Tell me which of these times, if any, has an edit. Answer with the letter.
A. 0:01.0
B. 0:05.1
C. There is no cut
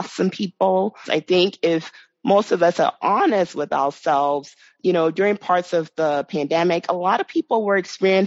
A